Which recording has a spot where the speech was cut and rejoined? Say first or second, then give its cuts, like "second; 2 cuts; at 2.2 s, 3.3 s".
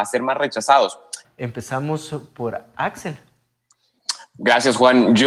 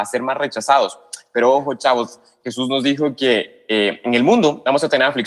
first; 1 cut; at 1.2 s